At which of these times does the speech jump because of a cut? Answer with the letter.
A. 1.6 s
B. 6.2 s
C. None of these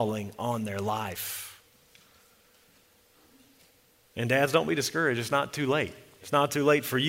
B